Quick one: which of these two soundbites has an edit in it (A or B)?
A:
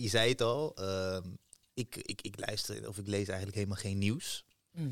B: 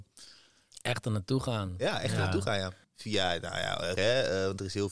B